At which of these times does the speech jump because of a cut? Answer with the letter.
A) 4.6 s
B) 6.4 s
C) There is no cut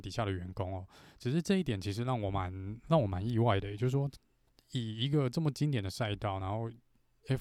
C